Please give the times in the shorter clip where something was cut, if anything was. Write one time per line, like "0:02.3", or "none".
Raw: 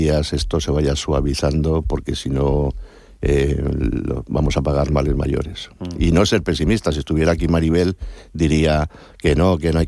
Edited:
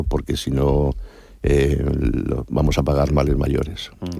none

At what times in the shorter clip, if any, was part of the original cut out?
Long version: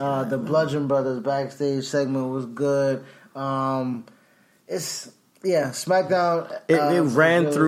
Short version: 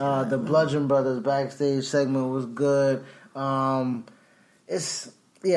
none

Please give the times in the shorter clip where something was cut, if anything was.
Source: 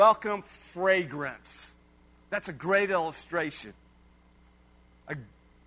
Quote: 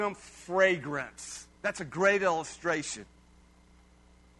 0:01.5

